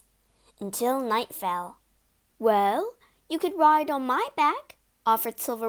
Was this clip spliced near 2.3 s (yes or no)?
yes